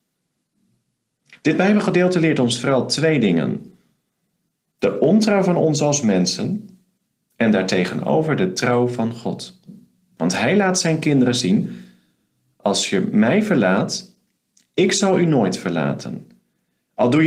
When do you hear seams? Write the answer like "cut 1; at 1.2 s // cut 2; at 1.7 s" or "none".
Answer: none